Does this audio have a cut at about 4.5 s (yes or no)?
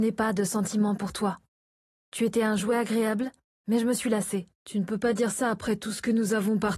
yes